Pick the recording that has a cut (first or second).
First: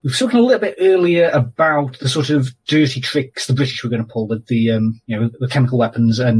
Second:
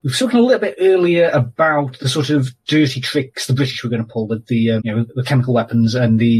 second